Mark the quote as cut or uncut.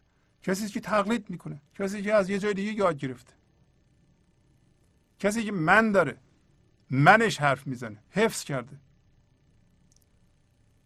cut